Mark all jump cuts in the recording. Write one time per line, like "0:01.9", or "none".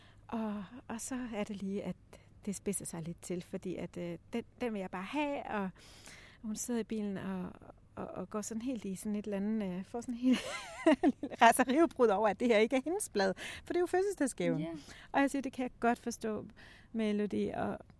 none